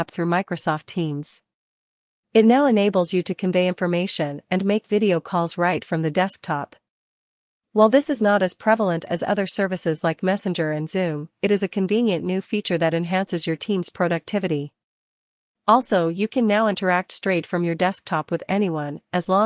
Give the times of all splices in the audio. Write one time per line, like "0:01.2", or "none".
none